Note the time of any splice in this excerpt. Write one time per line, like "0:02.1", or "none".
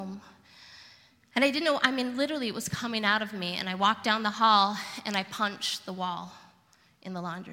none